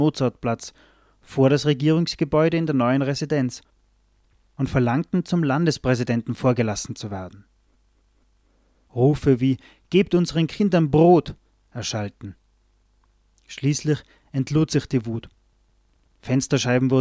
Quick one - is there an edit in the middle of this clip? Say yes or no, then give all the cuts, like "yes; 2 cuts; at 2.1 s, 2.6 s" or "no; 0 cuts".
no; 0 cuts